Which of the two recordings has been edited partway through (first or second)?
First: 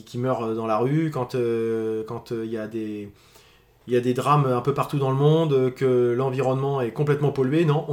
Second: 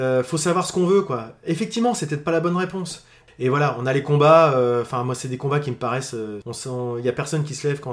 second